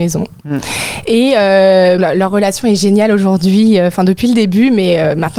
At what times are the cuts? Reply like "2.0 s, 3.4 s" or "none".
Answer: 2.0 s